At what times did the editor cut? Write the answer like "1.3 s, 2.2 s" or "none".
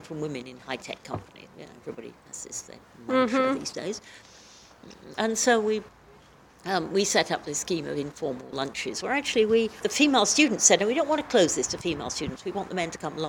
1.5 s